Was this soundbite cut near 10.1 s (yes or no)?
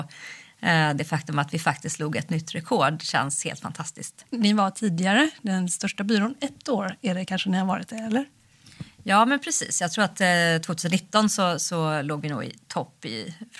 no